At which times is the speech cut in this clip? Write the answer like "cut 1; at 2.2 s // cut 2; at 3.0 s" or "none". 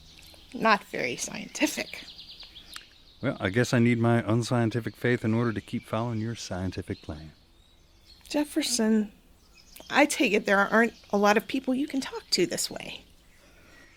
none